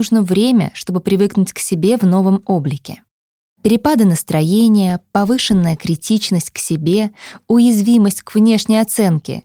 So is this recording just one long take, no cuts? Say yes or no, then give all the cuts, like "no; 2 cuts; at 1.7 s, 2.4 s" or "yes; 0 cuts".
yes; 0 cuts